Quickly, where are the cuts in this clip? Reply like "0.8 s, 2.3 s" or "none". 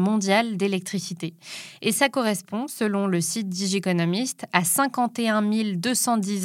none